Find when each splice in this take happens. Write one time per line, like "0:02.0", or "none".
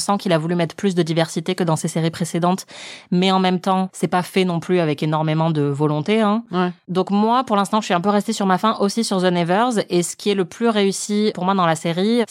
none